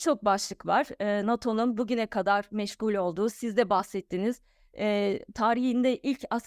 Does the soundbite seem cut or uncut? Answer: uncut